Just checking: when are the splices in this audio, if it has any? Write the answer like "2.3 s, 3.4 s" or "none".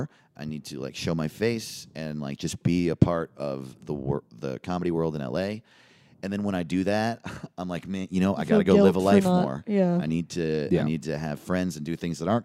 none